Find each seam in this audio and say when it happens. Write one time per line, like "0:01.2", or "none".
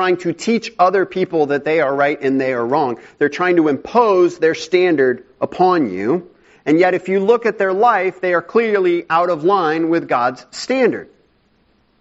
none